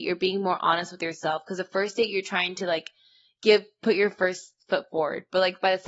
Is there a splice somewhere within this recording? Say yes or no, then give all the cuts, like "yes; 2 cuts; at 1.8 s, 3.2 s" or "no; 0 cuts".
no; 0 cuts